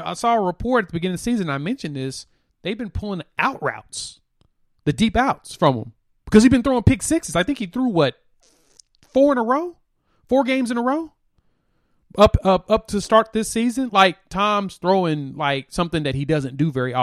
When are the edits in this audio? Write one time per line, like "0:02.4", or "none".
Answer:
none